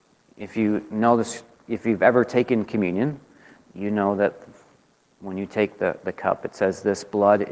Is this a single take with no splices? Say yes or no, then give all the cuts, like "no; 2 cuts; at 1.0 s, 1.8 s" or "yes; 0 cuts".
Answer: yes; 0 cuts